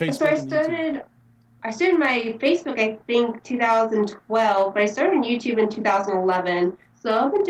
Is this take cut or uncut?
uncut